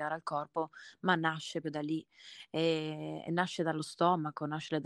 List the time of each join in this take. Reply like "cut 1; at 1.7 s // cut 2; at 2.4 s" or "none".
cut 1; at 1.6 s